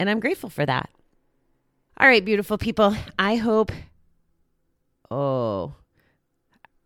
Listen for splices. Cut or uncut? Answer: cut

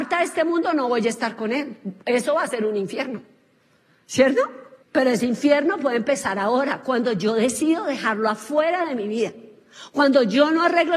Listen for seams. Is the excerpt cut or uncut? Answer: cut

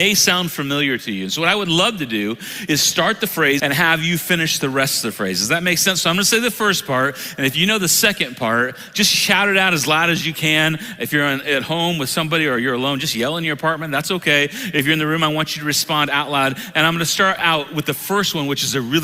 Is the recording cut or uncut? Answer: cut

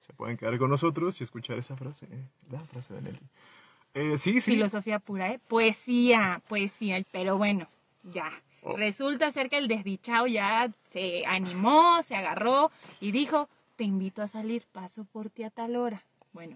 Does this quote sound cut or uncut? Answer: cut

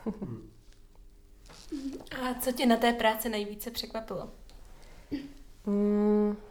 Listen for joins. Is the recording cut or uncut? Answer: uncut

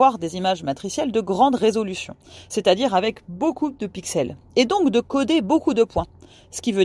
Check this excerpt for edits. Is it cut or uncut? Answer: uncut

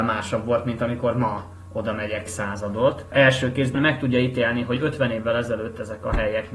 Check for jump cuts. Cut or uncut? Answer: cut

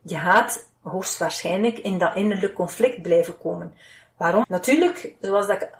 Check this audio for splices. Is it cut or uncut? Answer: cut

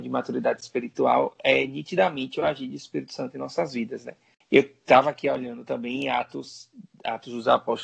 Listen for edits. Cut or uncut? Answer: uncut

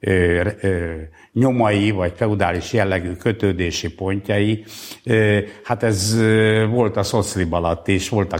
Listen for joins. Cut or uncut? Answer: uncut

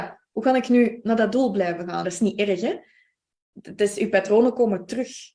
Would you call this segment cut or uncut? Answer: cut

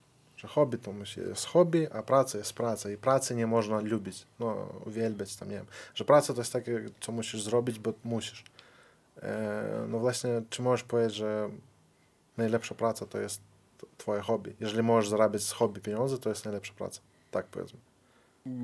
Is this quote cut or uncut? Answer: uncut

